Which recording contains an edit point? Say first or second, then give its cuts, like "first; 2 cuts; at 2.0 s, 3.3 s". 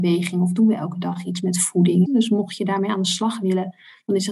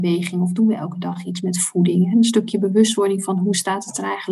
first; 1 cut; at 2.1 s